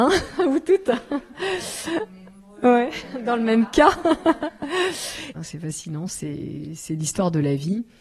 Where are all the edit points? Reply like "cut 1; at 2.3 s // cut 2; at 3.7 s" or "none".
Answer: cut 1; at 5.3 s

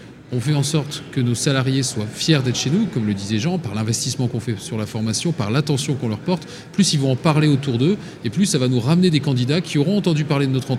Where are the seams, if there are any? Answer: none

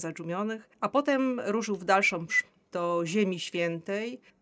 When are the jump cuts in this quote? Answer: cut 1; at 2.3 s

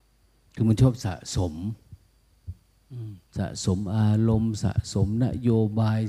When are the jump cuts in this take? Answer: cut 1; at 3.3 s

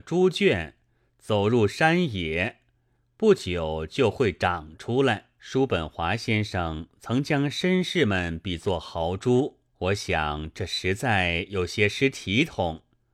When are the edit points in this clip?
cut 1; at 5.4 s // cut 2; at 9.7 s

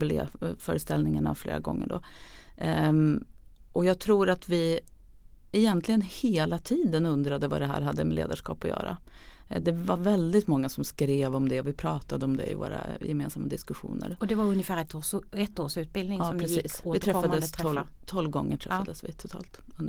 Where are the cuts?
none

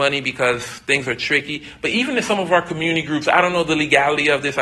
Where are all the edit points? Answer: none

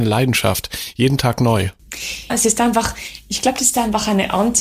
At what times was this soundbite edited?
cut 1; at 2.3 s

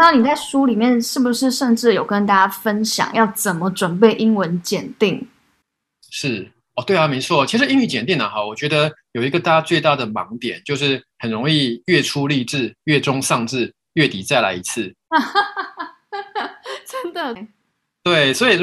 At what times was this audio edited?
cut 1; at 17.4 s

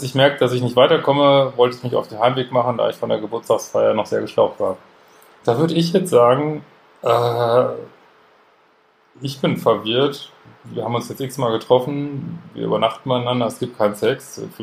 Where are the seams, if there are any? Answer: cut 1; at 5.4 s

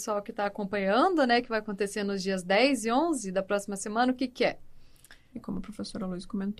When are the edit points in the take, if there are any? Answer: cut 1; at 5.3 s

